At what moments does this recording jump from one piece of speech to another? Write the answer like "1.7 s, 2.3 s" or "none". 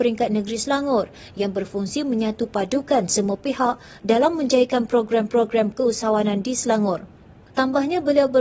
7.5 s